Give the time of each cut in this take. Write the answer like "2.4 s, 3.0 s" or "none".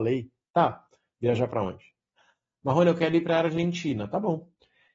none